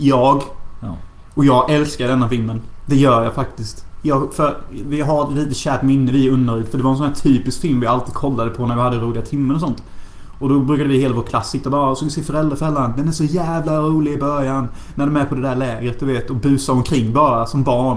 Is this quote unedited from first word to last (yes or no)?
yes